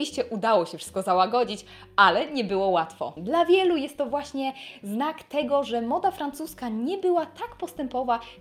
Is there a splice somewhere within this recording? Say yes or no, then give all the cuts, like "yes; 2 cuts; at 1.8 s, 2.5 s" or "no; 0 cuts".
yes; 1 cut; at 3.2 s